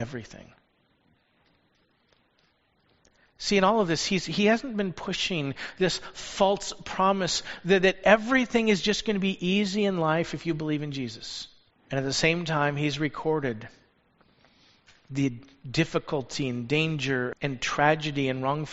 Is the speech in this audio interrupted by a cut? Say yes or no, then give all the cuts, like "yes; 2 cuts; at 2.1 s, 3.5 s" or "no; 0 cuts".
yes; 2 cuts; at 11.7 s, 17.3 s